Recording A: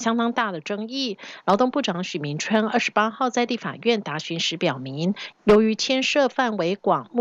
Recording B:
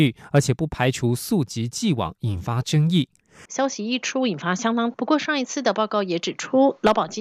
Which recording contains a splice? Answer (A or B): B